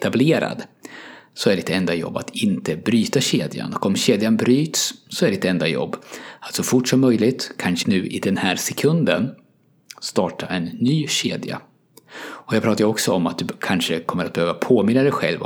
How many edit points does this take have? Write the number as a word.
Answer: one